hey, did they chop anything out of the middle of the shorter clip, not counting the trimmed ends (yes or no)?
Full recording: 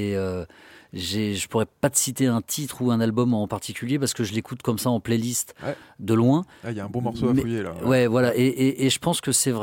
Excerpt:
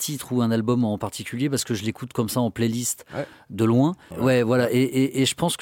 yes